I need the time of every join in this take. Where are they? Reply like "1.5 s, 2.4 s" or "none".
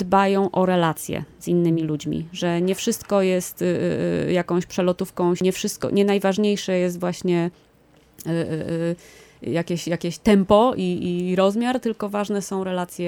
none